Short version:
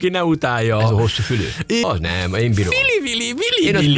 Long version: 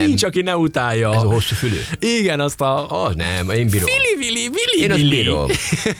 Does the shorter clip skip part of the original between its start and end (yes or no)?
yes